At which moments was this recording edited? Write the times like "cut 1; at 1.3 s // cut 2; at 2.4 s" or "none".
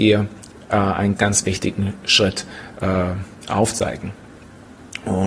cut 1; at 1.2 s